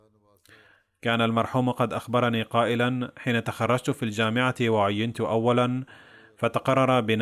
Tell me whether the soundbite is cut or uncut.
uncut